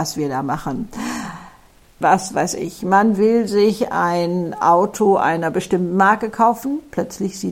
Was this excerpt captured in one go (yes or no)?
no